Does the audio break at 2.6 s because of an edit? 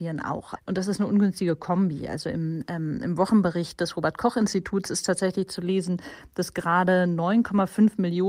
no; 0 cuts

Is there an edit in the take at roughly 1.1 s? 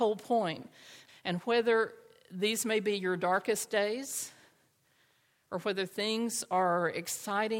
yes; 1 cut; at 1.1 s

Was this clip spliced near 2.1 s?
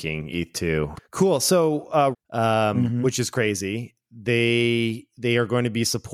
yes; 2 cuts; at 1.0 s, 2.1 s

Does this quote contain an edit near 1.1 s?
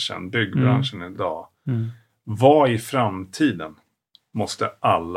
no; 0 cuts

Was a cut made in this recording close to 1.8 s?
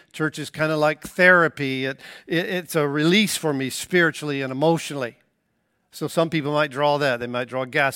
no; 0 cuts

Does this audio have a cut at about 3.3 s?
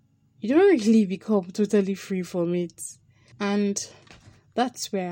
yes; 1 cut; at 3.3 s

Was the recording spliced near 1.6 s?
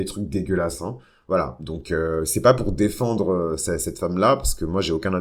no; 0 cuts

